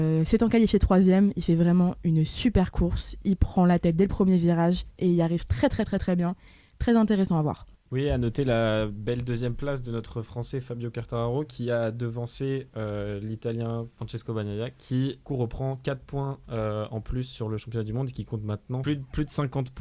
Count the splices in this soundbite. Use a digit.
1